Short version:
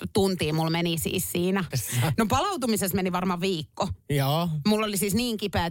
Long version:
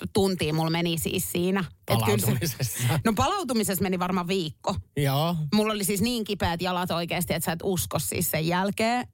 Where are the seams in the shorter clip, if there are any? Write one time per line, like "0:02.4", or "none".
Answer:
0:01.7